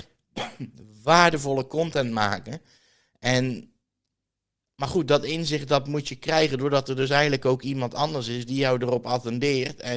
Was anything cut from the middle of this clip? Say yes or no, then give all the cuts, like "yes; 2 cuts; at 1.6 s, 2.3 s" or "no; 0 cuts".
no; 0 cuts